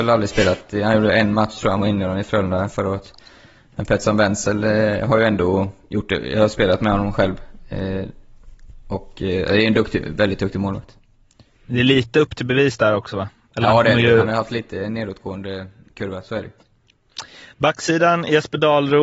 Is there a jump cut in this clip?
no; 0 cuts

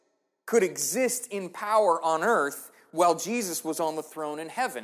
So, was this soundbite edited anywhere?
no; 0 cuts

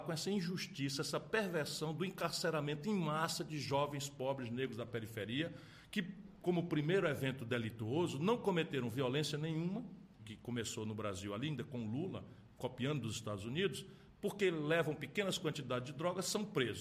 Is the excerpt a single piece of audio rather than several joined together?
no; 1 cut; at 10.2 s

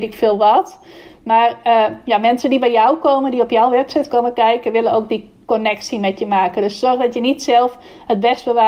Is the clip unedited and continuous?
yes; 0 cuts

